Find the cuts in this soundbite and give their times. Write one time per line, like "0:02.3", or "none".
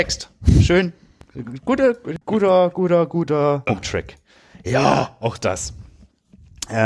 0:02.2
0:03.7